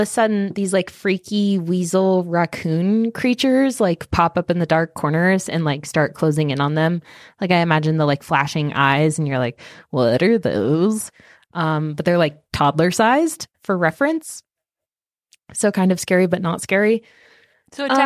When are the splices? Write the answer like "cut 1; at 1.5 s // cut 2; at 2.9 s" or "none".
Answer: cut 1; at 13.5 s

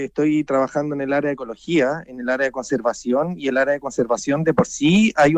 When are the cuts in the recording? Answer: none

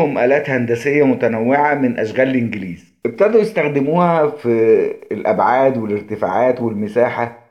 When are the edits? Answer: none

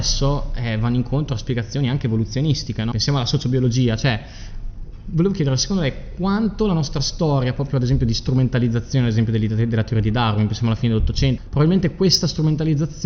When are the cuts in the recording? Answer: cut 1; at 2.9 s // cut 2; at 11.4 s

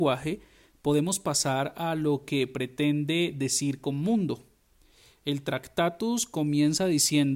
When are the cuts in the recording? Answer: none

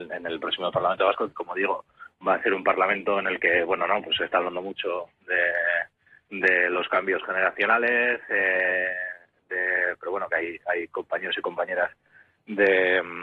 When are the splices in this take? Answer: none

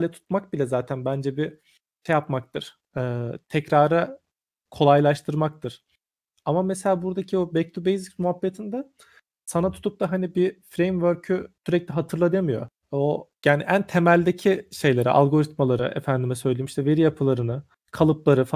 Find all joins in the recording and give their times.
cut 1; at 11.6 s // cut 2; at 13.4 s

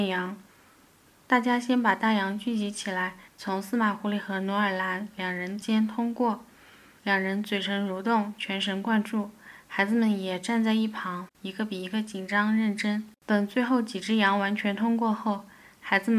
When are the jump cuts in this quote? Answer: cut 1; at 3.3 s // cut 2; at 11.3 s // cut 3; at 13.2 s

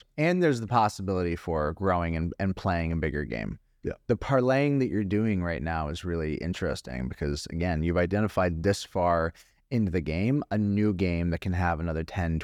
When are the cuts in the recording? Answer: none

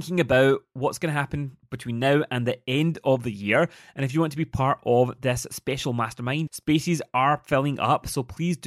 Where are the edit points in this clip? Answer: cut 1; at 6.5 s

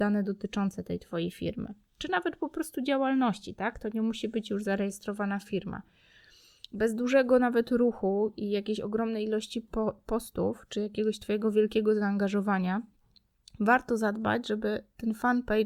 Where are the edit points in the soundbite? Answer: none

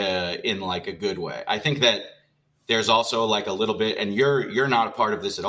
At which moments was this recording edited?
none

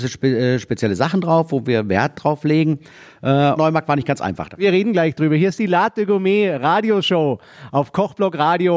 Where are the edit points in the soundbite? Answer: cut 1; at 3.6 s

